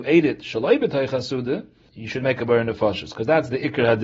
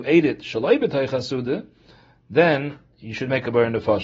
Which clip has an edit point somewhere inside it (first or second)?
first